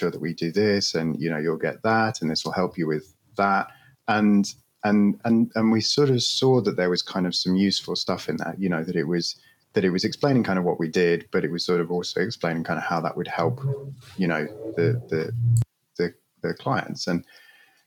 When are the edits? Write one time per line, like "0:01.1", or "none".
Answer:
none